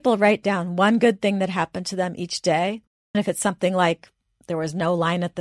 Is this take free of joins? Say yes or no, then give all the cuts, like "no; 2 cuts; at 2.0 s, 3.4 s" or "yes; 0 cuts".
no; 1 cut; at 3.1 s